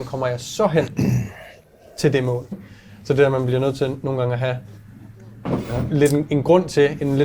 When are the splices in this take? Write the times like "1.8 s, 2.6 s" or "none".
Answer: 2.5 s